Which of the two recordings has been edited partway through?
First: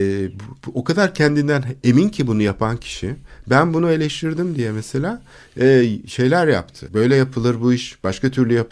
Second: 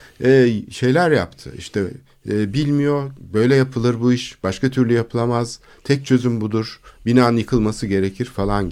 first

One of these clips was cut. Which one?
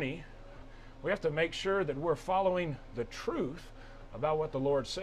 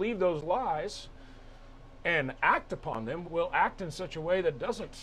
second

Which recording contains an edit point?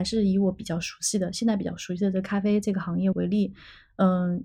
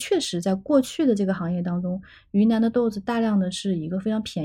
first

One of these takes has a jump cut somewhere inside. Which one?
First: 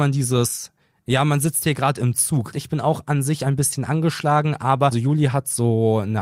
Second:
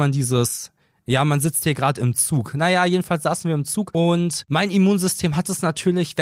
first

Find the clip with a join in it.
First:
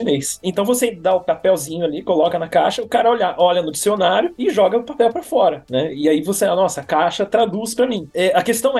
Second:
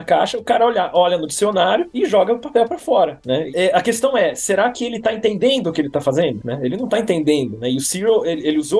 second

